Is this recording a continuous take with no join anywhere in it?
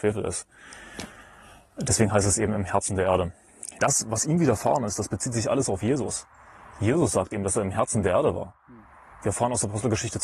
no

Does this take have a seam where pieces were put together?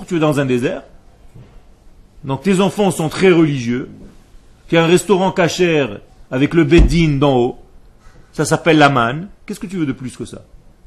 no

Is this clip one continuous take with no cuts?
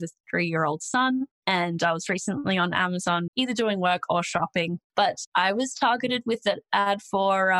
no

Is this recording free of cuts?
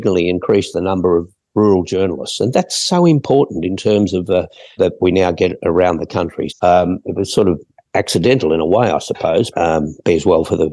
no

